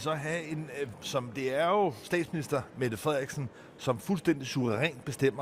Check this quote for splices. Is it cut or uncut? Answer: cut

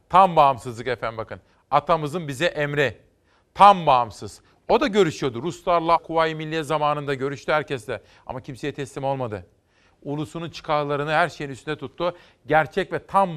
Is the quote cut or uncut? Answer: cut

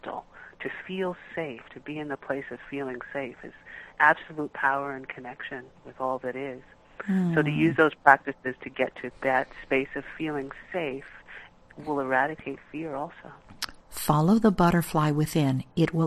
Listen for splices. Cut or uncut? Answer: cut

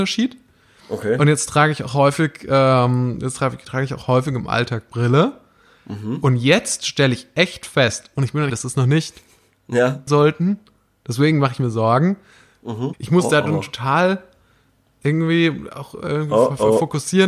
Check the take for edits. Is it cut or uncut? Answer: cut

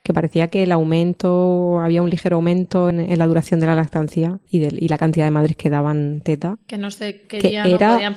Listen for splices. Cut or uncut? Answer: cut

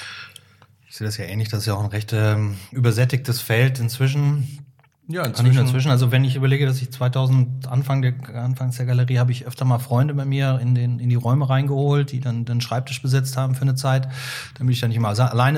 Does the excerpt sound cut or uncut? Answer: uncut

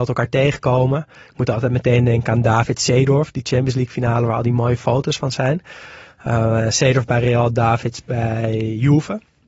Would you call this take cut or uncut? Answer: uncut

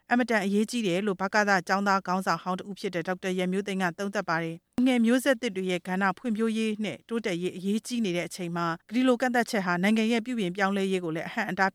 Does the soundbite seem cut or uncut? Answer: cut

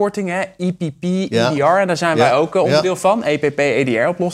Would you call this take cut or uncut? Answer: uncut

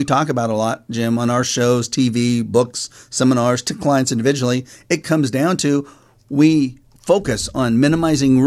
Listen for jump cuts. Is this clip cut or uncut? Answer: uncut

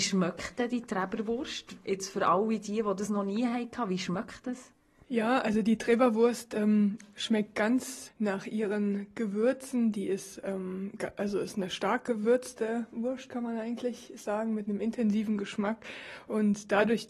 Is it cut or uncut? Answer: cut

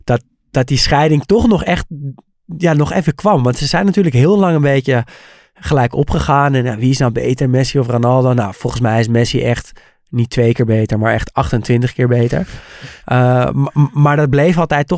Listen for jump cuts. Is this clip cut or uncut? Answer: uncut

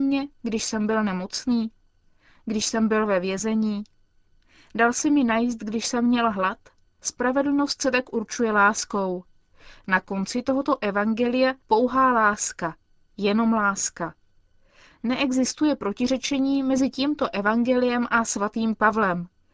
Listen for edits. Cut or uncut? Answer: cut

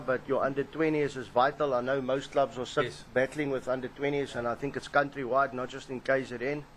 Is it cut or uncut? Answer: uncut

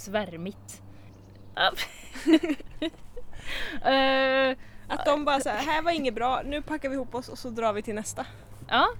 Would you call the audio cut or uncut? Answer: cut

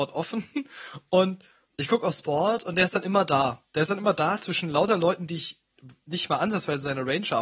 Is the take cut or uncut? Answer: uncut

